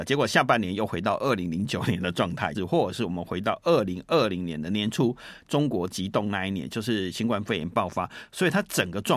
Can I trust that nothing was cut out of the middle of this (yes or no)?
no